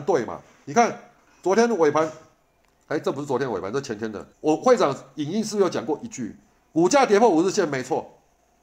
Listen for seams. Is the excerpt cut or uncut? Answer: cut